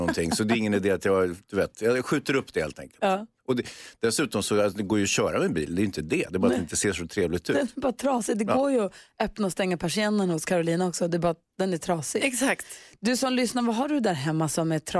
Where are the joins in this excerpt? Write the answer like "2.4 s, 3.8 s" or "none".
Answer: none